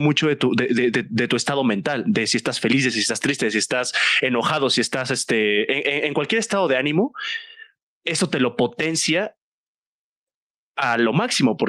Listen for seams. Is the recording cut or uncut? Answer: uncut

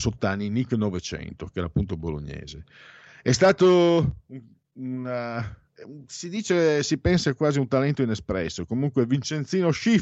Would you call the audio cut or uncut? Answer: uncut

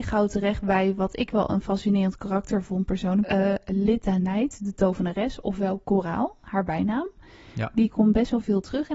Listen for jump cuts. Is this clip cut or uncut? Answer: cut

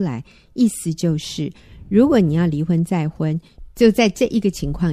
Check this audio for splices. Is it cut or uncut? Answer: uncut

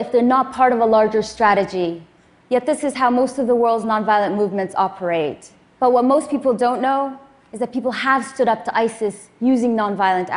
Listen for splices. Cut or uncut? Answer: cut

